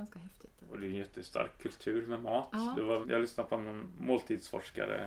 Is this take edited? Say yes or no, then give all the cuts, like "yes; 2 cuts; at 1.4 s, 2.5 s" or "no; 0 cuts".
yes; 1 cut; at 3.0 s